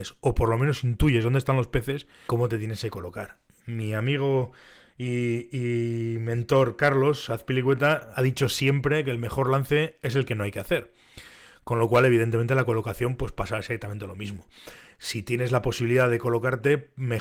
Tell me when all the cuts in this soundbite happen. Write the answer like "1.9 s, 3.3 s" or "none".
2.3 s, 3.6 s